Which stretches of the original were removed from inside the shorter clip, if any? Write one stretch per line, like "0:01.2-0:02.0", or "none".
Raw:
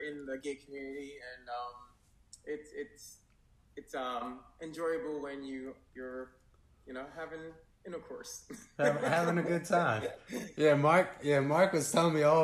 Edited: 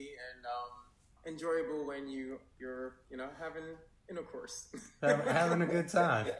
0:02.2-0:04.5
0:06.4-0:06.8

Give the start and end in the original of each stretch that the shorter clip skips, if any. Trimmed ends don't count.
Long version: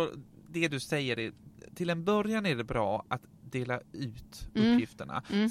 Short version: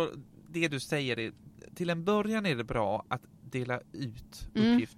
none

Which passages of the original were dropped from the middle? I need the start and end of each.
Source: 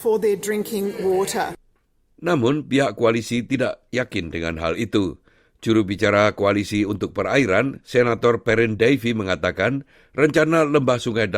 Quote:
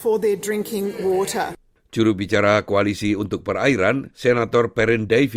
0:01.8-0:05.5

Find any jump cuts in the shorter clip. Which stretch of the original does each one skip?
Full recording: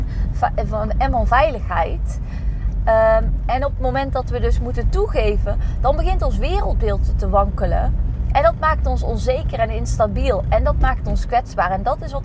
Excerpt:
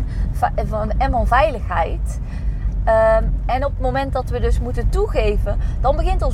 none

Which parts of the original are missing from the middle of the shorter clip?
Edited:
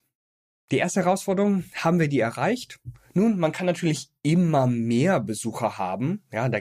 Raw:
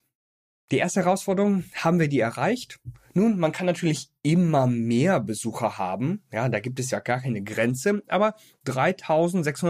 none

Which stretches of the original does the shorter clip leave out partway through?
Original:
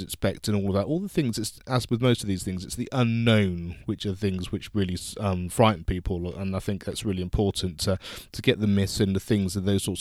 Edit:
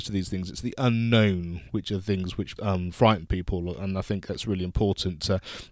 0:04.7-0:05.1

